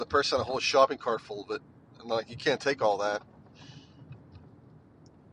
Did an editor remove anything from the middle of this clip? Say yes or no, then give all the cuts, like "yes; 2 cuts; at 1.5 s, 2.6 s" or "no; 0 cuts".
no; 0 cuts